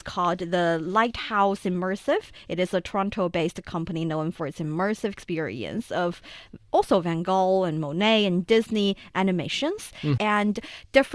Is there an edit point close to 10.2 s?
yes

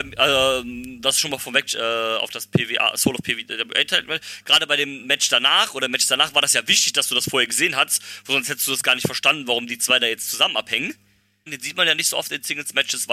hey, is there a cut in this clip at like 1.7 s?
yes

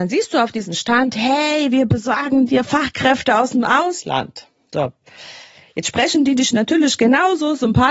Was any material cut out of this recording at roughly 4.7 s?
no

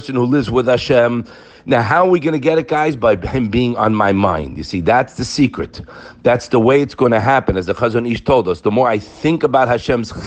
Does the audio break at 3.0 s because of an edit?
no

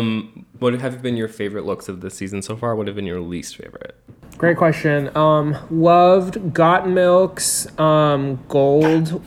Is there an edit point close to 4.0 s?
no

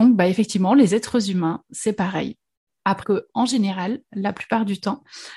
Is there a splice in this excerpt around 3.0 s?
yes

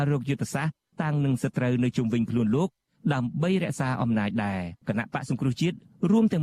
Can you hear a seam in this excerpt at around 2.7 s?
no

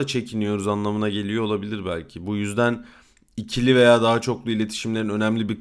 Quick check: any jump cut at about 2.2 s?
no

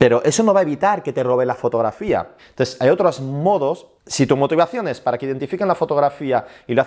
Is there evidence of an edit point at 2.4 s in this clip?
yes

